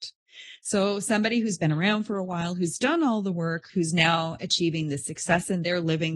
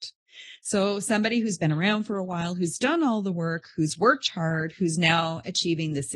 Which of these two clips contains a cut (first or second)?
first